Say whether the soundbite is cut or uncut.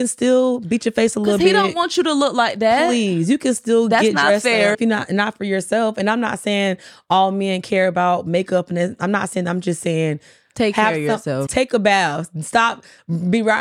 cut